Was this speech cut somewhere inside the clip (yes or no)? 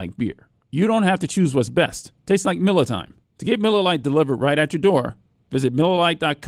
yes